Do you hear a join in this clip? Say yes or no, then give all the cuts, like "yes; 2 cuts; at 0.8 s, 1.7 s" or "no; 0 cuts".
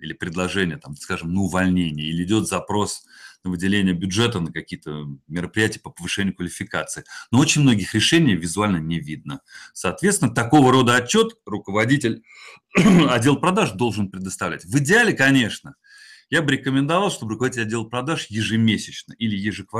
no; 0 cuts